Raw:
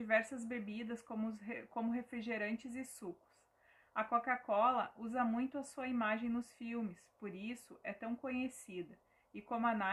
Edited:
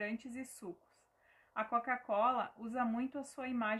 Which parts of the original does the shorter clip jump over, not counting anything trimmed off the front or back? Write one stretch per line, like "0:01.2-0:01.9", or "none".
none